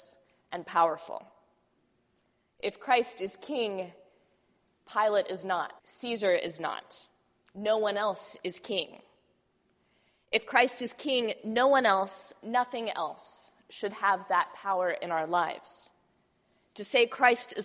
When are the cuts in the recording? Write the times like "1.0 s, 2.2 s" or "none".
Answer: 5.8 s